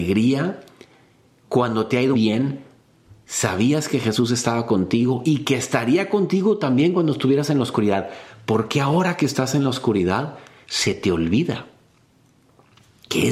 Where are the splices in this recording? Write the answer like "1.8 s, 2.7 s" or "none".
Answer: 2.1 s